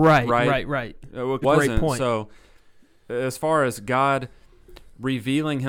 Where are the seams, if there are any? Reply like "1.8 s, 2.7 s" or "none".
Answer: 1.4 s